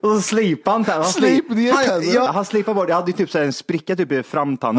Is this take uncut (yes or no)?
no